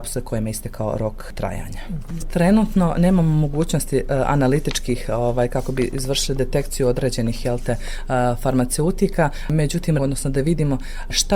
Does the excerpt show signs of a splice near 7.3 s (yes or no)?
no